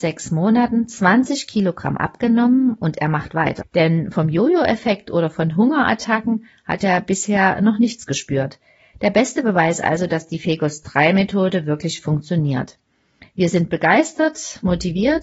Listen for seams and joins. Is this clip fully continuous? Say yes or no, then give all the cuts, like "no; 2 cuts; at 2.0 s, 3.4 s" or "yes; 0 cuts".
no; 1 cut; at 3.6 s